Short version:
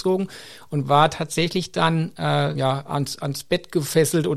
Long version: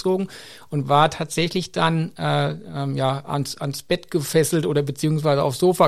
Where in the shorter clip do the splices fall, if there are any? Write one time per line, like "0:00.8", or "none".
0:02.5